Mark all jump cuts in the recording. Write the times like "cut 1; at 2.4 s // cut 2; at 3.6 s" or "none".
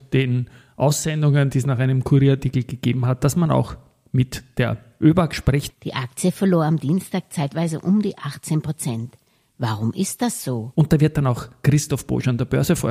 cut 1; at 5.7 s // cut 2; at 10.7 s